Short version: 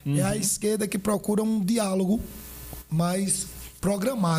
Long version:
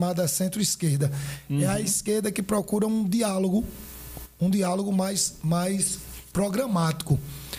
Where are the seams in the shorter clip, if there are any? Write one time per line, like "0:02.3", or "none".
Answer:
0:02.9